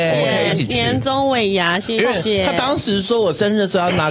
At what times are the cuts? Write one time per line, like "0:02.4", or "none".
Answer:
none

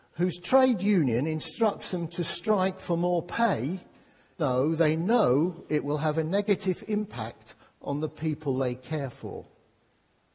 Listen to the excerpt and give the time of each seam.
0:04.4

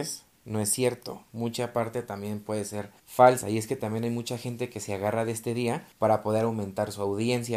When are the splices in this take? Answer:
0:03.0
0:05.9

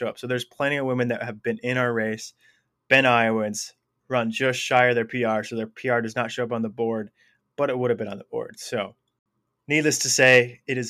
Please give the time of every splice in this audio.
none

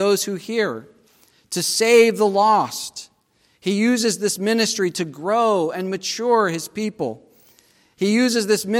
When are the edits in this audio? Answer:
none

